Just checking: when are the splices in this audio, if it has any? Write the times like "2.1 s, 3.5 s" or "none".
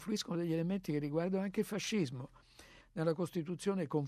2.8 s